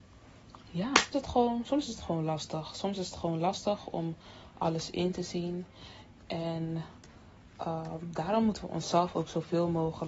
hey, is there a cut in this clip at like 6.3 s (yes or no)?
no